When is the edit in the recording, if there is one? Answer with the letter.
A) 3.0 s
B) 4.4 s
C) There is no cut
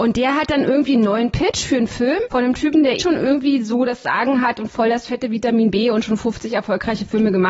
A